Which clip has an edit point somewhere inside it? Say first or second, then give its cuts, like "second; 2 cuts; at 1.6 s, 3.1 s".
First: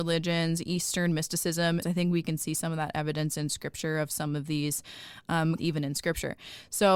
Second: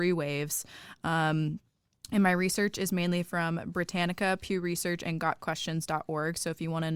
first; 2 cuts; at 1.8 s, 5.6 s